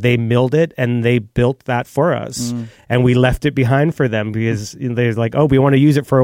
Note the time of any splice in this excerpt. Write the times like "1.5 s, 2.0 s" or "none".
none